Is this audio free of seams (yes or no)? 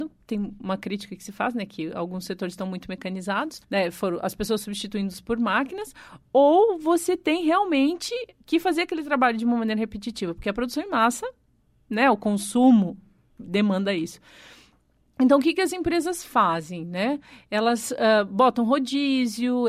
no